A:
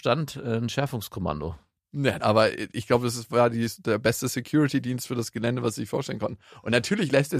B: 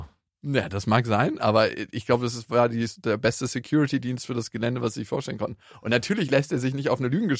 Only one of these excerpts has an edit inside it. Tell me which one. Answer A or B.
A